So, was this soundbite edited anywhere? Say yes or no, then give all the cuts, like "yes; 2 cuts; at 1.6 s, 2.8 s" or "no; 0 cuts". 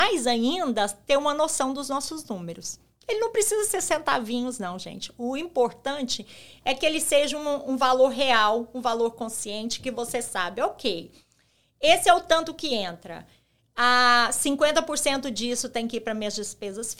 no; 0 cuts